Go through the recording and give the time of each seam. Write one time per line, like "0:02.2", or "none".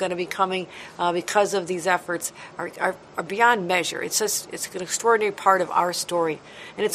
none